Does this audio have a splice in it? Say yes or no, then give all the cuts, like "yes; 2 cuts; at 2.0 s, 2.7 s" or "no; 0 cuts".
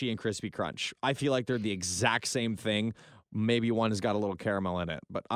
no; 0 cuts